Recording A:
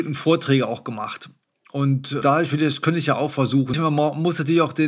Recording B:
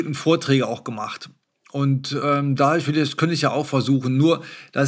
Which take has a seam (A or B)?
A